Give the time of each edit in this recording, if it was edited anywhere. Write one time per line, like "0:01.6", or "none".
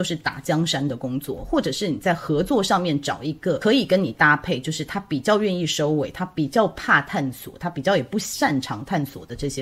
none